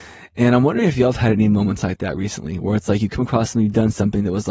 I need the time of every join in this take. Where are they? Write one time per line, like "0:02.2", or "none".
none